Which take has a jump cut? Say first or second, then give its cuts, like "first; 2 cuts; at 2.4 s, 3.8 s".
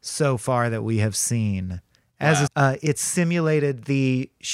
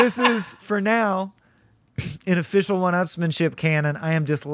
first; 1 cut; at 2.5 s